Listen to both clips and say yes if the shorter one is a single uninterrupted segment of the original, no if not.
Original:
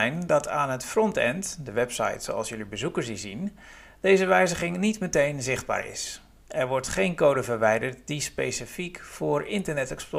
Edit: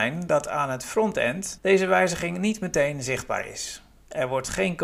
no